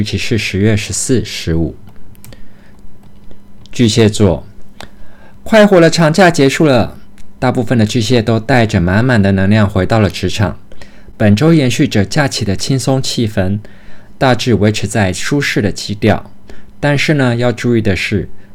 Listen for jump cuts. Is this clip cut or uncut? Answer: uncut